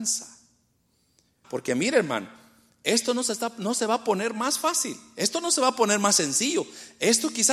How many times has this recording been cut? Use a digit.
1